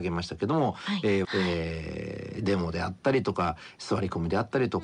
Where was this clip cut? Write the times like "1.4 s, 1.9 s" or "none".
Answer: 1.2 s